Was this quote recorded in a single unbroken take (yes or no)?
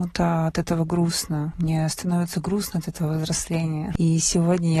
yes